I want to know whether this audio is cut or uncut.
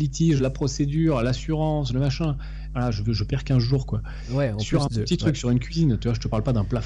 uncut